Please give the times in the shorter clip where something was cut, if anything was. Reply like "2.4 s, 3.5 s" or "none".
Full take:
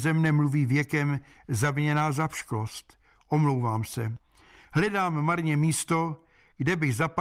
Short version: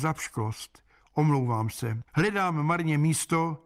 2.1 s